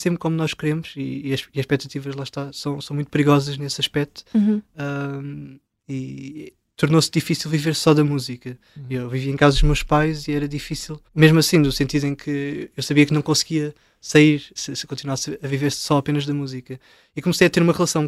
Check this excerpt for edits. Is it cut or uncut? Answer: cut